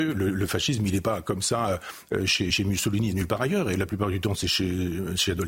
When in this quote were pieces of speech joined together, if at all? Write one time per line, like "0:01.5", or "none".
0:02.5